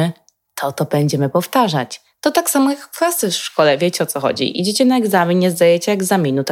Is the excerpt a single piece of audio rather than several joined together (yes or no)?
yes